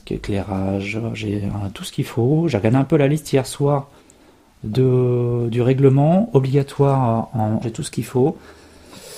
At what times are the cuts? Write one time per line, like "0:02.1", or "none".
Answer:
0:07.6